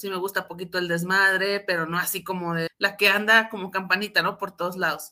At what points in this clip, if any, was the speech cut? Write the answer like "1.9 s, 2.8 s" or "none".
2.7 s